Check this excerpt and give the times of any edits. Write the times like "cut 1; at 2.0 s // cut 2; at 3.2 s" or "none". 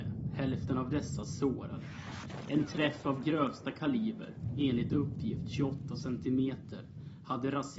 none